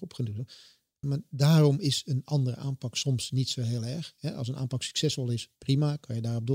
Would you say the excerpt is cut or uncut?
cut